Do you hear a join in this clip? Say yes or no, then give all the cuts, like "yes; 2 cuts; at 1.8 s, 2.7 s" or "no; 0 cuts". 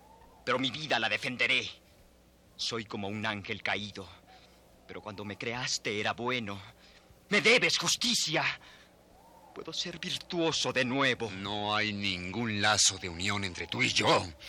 no; 0 cuts